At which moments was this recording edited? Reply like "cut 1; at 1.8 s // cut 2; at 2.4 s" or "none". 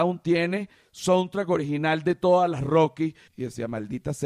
cut 1; at 3.3 s